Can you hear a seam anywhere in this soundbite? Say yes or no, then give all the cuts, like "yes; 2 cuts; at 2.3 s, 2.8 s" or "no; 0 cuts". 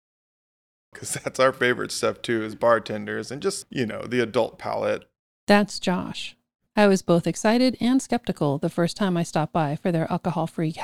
yes; 3 cuts; at 0.9 s, 3.6 s, 6.7 s